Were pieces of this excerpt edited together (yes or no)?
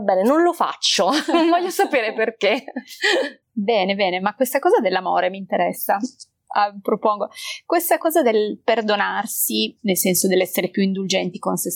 yes